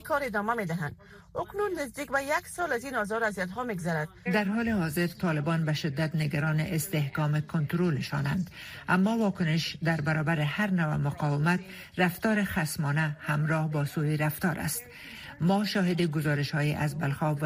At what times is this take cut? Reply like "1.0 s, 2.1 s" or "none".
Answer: 4.3 s